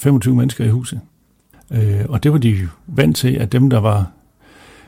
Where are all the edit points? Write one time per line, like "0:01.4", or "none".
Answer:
0:01.5